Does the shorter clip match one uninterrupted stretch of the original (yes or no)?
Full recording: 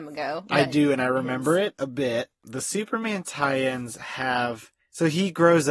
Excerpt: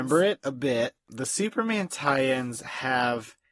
yes